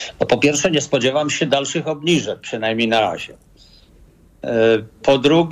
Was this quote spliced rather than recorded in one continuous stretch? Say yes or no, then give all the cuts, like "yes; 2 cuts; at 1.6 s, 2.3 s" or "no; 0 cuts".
no; 0 cuts